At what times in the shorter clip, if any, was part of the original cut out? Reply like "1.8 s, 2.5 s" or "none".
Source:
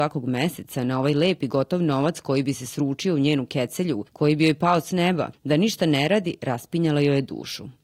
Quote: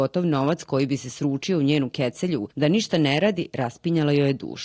2.5 s